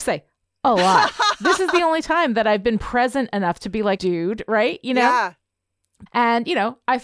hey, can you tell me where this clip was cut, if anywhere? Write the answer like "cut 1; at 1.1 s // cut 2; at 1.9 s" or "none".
cut 1; at 4.0 s // cut 2; at 6.1 s